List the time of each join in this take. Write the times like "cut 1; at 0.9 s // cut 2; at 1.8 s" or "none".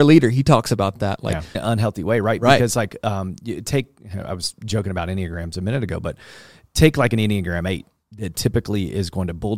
cut 1; at 1.5 s